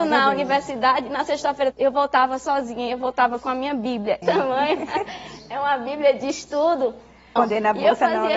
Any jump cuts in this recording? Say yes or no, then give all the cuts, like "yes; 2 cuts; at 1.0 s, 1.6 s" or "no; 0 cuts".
yes; 3 cuts; at 1.7 s, 4.2 s, 7.4 s